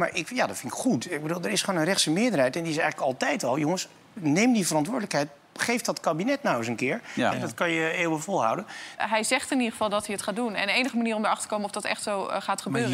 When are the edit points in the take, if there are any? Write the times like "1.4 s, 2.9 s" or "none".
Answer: 7.3 s, 9.0 s